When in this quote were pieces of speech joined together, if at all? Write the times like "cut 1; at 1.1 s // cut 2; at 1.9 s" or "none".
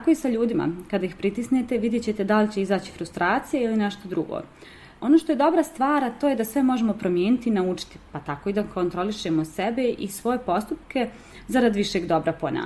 none